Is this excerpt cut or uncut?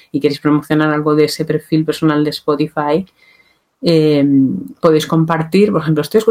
uncut